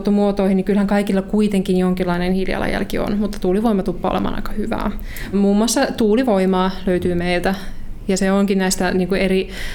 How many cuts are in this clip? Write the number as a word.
one